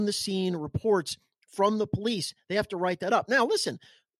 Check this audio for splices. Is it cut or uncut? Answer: uncut